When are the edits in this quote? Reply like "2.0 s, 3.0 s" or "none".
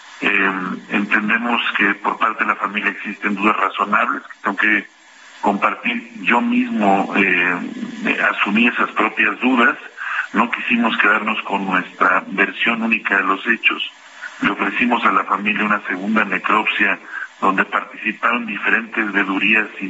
none